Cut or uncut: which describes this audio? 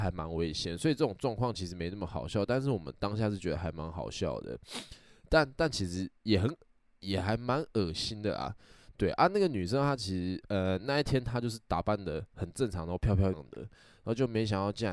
cut